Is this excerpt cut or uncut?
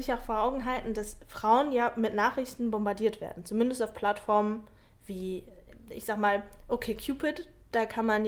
uncut